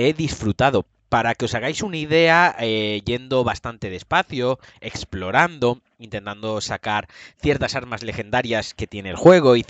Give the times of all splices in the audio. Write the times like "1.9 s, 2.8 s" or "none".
none

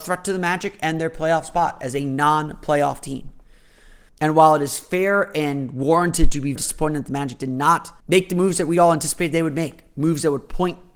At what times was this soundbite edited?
4.1 s, 6.6 s, 8.0 s

